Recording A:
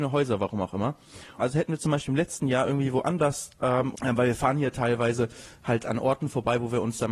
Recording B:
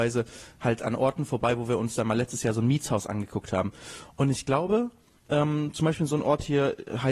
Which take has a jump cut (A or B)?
A